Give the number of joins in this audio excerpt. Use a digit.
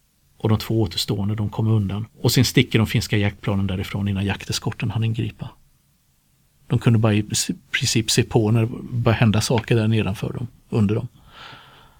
1